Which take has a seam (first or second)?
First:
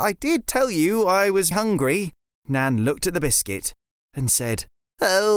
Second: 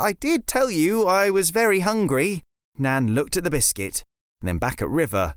first